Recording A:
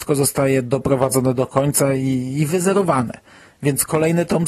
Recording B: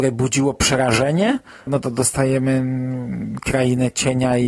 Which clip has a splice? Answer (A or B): B